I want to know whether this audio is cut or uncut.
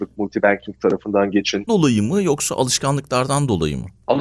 cut